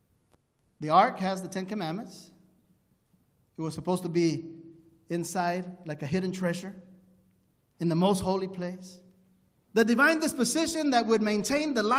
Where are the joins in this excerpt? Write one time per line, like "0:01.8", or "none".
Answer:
0:09.7